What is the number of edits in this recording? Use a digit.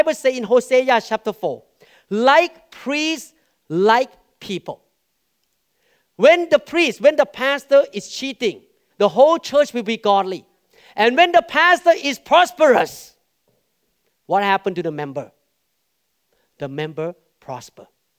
1